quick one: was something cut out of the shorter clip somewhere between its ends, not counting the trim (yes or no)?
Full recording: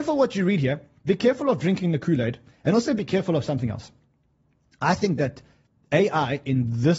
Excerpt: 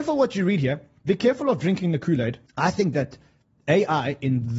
yes